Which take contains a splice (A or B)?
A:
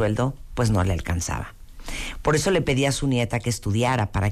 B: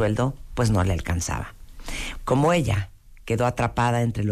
B